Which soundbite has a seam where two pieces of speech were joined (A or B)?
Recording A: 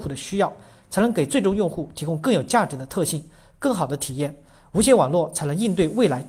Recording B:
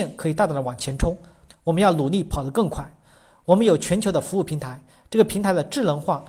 B